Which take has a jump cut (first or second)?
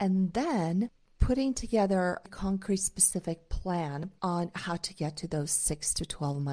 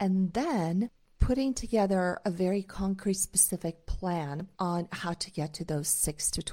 first